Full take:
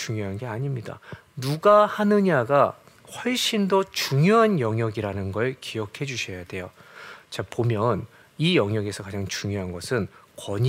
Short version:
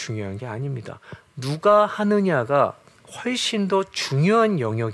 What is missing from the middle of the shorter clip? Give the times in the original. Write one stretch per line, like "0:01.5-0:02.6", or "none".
none